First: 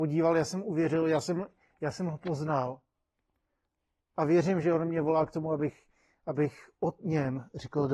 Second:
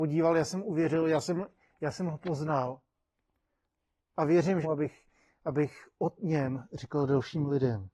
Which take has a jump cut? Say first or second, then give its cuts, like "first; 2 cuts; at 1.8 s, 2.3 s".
second; 1 cut; at 4.6 s